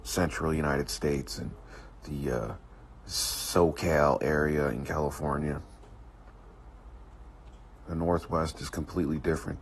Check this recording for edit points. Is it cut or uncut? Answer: cut